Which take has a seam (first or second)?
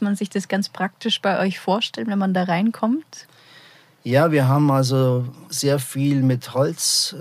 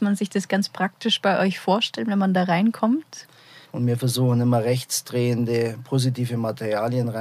second